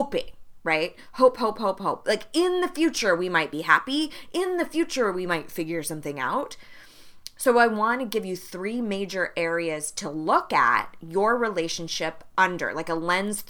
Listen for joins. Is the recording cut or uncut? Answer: uncut